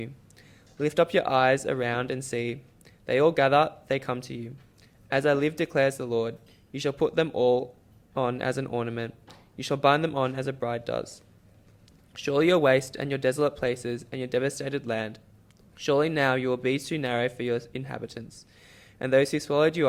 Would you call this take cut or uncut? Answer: uncut